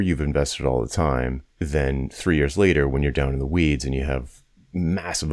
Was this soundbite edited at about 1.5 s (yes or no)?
yes